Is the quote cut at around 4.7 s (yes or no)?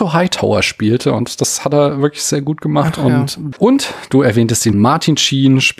yes